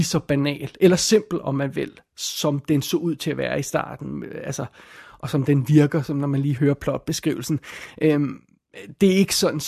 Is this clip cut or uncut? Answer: cut